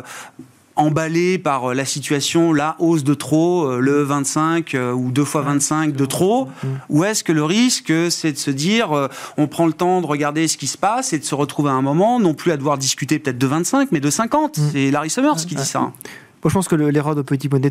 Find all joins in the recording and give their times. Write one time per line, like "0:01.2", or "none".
none